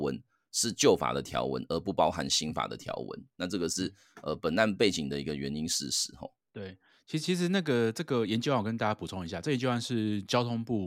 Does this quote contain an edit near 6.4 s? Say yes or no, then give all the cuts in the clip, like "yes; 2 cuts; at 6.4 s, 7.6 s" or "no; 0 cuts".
no; 0 cuts